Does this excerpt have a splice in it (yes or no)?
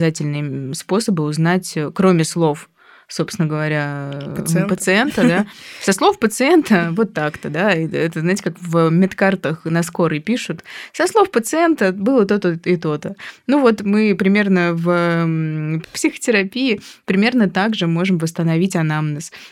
no